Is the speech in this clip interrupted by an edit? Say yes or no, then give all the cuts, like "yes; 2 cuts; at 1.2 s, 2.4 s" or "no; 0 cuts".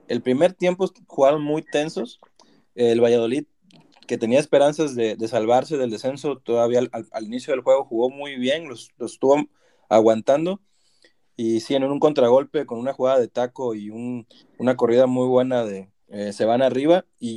yes; 1 cut; at 16.0 s